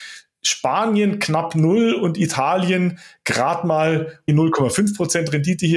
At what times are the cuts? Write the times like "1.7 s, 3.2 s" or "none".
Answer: none